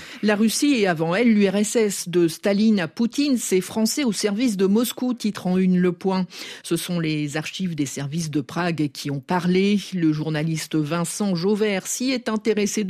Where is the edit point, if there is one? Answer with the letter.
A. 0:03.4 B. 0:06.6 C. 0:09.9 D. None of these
D